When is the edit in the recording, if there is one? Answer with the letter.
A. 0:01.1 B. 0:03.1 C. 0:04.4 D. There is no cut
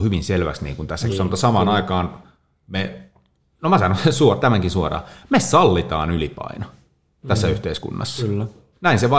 A